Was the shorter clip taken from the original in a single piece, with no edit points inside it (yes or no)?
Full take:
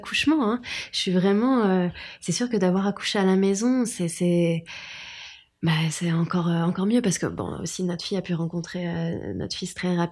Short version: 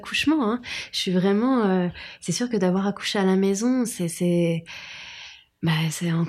yes